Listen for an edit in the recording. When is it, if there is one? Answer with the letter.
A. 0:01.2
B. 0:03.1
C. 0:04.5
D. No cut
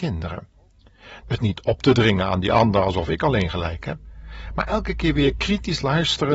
A